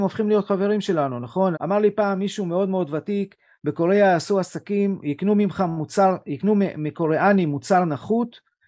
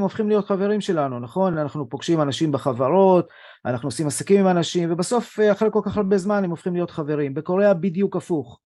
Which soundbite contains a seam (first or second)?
first